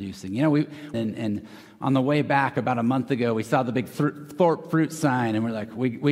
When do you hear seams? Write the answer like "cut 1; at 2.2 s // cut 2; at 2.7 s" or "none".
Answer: cut 1; at 0.9 s